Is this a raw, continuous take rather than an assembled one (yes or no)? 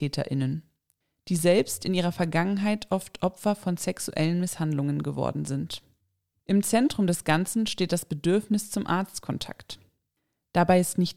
yes